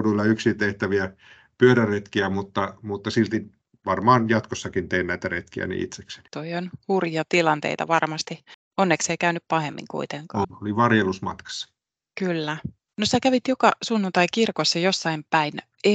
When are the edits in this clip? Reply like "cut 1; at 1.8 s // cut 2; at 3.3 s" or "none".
cut 1; at 10.4 s